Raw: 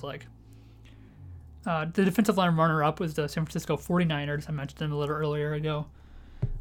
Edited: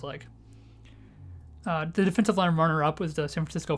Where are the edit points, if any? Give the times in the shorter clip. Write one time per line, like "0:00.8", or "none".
none